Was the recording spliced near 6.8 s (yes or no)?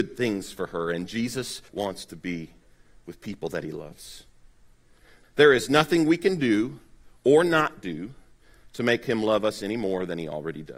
no